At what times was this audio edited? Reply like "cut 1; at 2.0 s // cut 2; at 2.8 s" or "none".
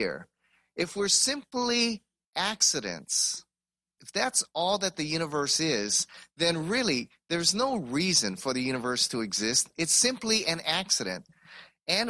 cut 1; at 4.0 s